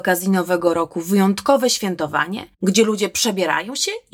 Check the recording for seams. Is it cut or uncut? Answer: uncut